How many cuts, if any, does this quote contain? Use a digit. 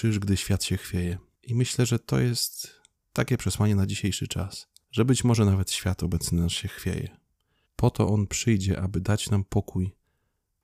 1